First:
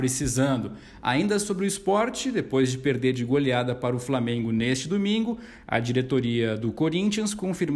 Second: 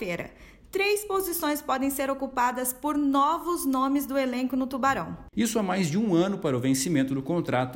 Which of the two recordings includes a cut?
second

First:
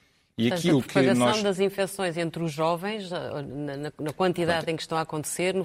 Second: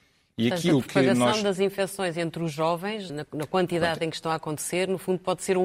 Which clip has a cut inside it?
second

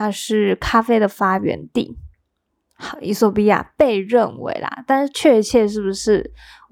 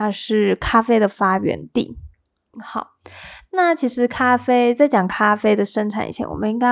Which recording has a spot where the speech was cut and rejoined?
second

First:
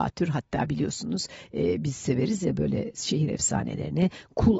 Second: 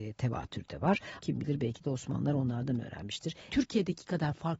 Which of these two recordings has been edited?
second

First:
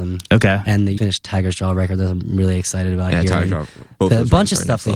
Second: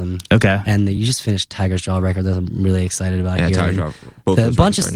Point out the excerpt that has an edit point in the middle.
first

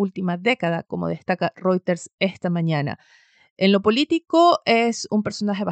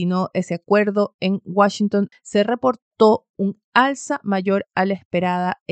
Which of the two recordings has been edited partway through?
second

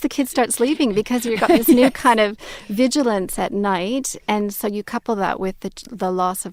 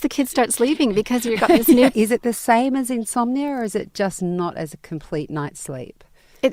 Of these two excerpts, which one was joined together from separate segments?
second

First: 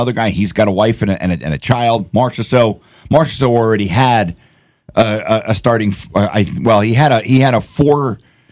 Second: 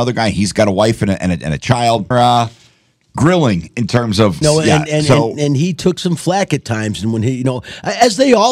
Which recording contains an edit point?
second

